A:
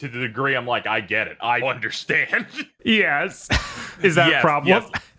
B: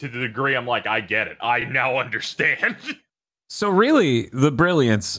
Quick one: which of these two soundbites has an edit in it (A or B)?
A